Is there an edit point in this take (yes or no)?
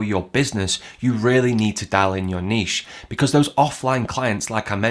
no